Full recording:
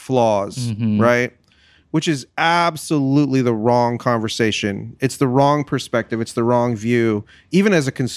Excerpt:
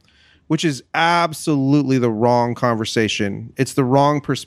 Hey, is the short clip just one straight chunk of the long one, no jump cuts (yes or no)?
yes